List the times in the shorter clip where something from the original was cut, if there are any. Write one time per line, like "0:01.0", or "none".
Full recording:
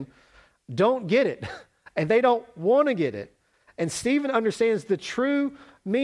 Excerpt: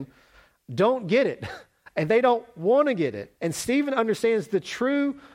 0:03.4